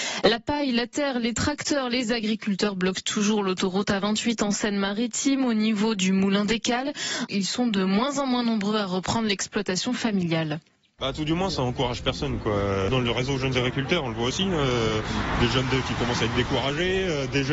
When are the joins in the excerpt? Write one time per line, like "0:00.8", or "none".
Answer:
0:07.3